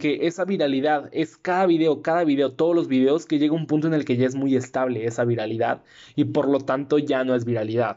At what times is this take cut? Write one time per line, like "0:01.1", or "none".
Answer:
none